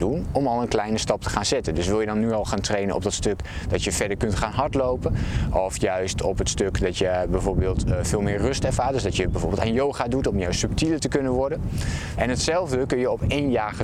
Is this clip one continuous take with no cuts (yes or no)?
no